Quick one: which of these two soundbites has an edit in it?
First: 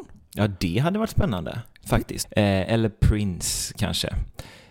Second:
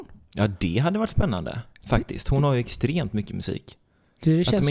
first; 1 cut; at 2.2 s

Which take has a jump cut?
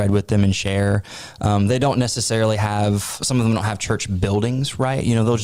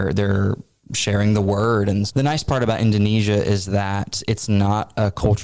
second; 1 cut; at 2.1 s

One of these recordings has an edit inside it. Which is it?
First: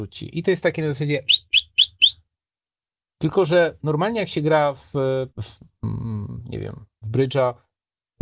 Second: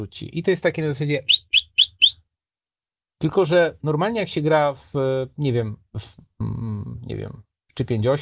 first; 2 cuts; at 5.3 s, 7.0 s

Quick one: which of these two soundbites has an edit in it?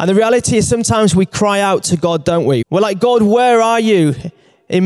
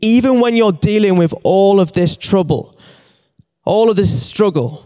first; 1 cut; at 2.6 s

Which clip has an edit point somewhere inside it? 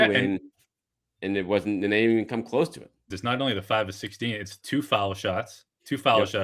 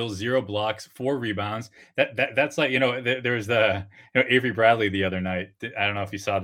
first; 1 cut; at 3.1 s

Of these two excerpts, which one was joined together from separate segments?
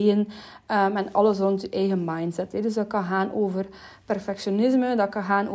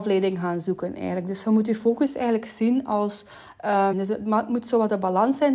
second; 1 cut; at 3.9 s

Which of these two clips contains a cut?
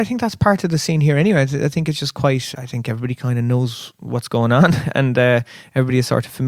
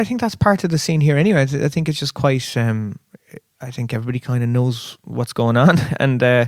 first; 1 cut; at 2.5 s

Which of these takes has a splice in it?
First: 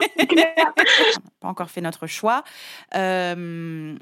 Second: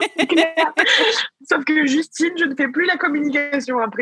first; 1 cut; at 1.1 s

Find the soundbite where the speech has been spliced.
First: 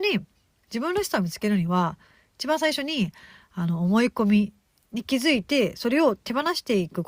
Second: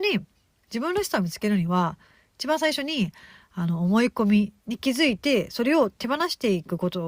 second; 1 cut; at 4.6 s

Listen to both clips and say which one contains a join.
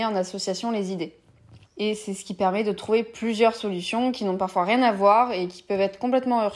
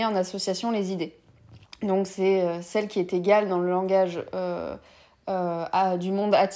first; 1 cut; at 1.6 s

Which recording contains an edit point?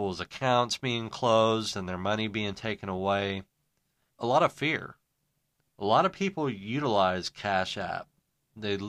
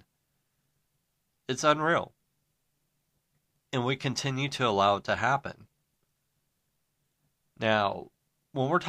first; 1 cut; at 4.1 s

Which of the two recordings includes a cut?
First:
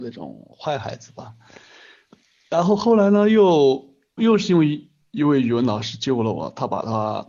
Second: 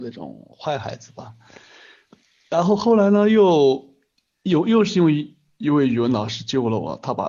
first; 1 cut; at 4.2 s

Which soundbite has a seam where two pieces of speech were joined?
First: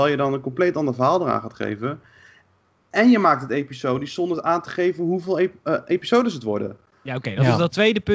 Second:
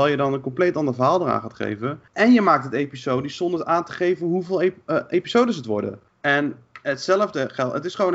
second; 2 cuts; at 2.1 s, 6.1 s

